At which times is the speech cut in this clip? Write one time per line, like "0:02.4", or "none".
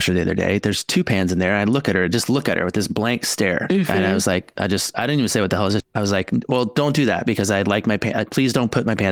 0:04.6
0:05.8